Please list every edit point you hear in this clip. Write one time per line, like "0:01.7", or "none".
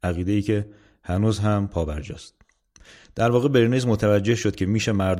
none